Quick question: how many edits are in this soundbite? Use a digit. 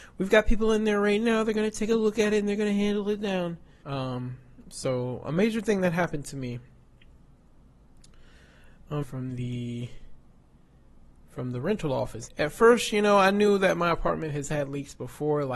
3